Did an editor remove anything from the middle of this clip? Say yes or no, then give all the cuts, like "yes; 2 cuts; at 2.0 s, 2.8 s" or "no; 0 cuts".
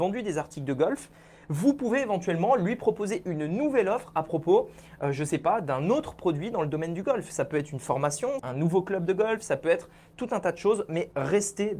yes; 1 cut; at 8.4 s